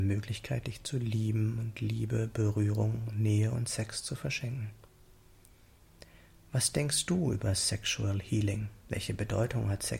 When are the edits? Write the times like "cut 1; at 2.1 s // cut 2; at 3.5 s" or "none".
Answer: cut 1; at 8.8 s